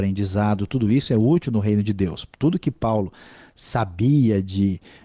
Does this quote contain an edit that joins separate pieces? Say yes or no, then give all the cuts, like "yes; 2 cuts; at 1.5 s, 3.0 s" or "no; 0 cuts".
no; 0 cuts